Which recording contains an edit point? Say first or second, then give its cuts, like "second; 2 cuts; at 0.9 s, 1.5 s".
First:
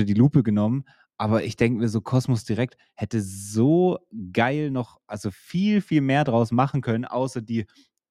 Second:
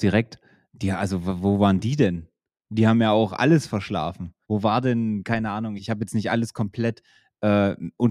second; 2 cuts; at 4.4 s, 5.8 s